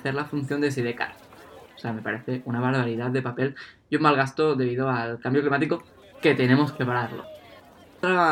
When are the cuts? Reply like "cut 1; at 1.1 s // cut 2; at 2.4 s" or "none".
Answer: cut 1; at 1.7 s